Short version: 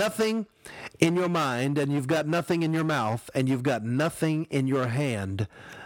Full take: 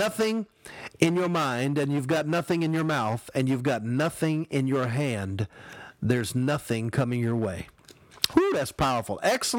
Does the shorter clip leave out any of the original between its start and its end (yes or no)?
no